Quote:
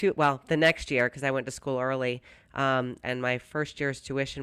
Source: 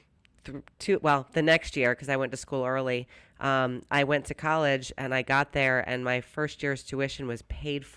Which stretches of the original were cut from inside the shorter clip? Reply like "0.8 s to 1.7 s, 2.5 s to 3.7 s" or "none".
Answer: 3.9 s to 5.8 s

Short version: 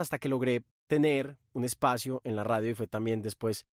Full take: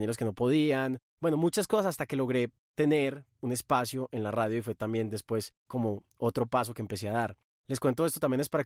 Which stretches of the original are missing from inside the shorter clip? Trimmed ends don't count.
none

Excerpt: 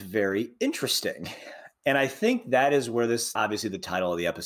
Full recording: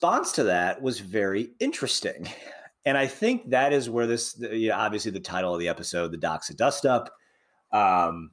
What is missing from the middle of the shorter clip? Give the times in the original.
4.3 s to 4.8 s

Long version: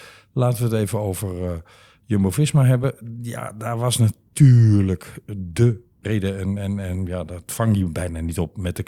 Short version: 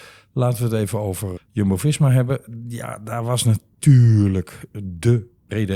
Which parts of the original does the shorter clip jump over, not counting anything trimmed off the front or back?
1.4 s to 1.9 s

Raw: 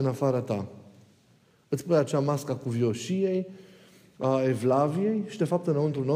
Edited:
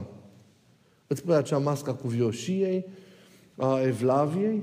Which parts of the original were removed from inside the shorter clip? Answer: none

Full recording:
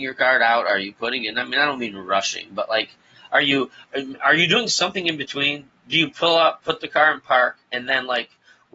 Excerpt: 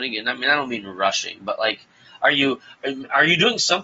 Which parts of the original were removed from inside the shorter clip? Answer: none

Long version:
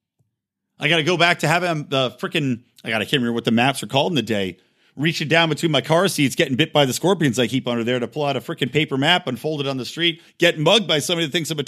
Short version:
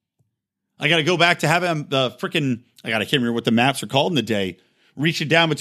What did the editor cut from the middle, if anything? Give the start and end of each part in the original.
none

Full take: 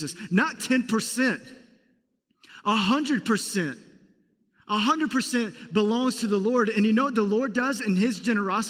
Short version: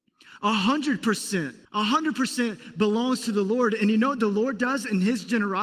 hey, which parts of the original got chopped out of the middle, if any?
3.9 s to 4.6 s

